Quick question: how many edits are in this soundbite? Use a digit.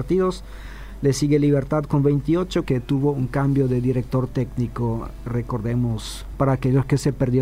1